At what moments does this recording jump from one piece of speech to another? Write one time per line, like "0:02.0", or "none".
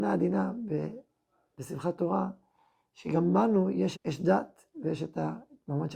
0:03.9